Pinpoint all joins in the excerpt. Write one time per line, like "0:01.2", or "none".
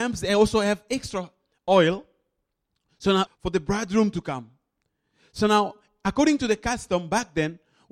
0:03.3